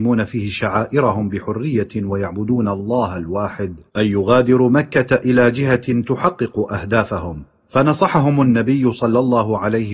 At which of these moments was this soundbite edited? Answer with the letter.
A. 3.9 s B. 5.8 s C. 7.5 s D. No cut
A